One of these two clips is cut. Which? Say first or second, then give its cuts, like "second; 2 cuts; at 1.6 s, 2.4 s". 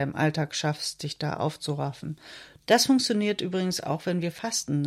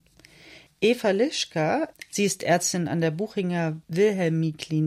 first; 1 cut; at 2.6 s